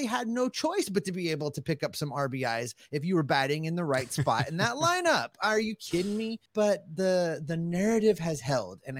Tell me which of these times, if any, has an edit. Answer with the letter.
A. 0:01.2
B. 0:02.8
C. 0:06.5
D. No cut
C